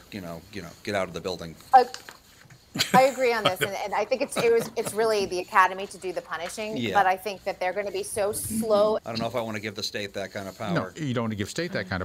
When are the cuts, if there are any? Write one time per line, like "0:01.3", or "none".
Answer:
0:09.0